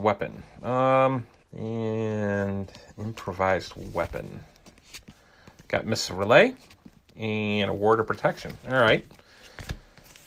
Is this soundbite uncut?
no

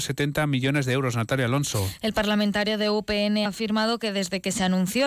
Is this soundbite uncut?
no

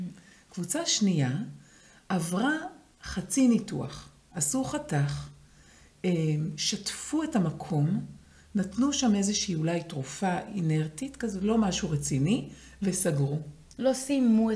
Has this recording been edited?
no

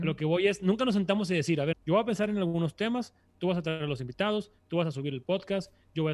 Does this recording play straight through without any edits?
no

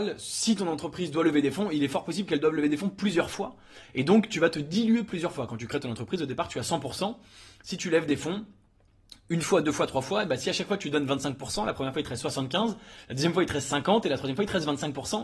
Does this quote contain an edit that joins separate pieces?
no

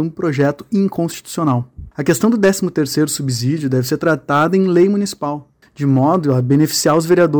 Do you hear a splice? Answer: yes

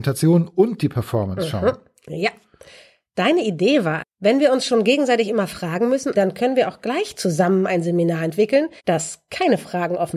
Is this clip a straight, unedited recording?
no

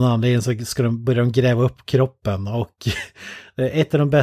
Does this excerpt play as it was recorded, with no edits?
yes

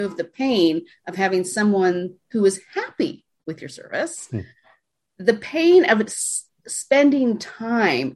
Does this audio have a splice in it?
no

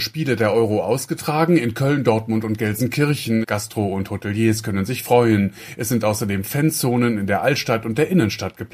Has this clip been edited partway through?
yes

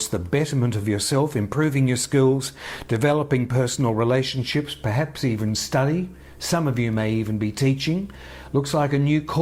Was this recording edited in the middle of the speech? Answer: no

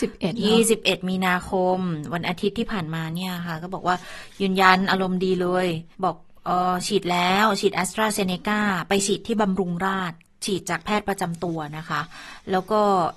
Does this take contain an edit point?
yes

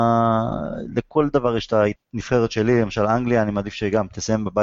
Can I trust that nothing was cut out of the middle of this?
no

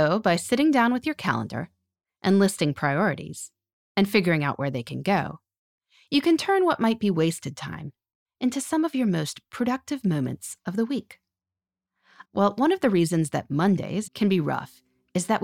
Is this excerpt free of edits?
no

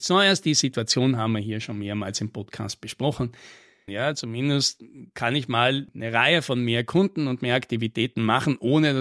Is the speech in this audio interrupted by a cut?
yes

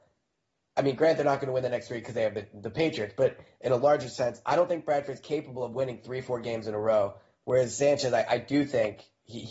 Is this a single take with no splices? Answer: yes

